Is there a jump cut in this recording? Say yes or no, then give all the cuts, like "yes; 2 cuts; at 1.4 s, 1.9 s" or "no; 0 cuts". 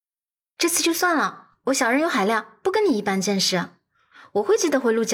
no; 0 cuts